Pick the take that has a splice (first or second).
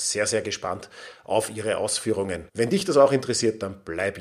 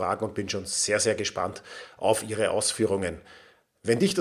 first